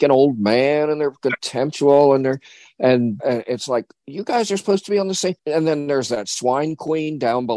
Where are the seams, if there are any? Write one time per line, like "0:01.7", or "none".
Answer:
0:03.2
0:05.4